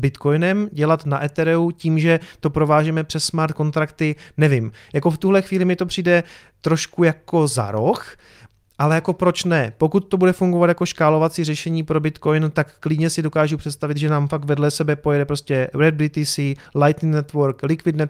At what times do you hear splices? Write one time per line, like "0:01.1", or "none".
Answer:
none